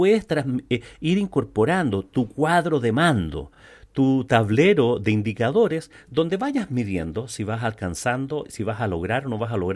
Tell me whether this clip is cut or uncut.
uncut